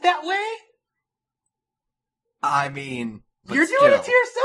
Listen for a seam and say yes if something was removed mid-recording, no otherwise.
yes